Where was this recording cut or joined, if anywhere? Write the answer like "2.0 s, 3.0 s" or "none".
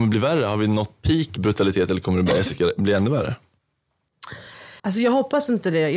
4.8 s